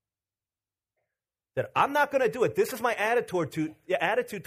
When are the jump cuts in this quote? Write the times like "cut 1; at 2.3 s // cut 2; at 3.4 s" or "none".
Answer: none